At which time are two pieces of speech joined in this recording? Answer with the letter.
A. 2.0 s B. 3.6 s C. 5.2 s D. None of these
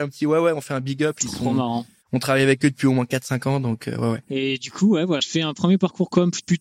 C